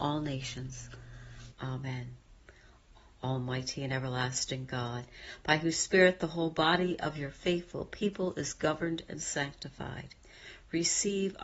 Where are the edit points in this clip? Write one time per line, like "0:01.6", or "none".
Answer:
0:01.5